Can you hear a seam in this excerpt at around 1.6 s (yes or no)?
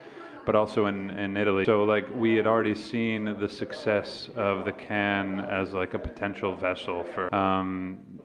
yes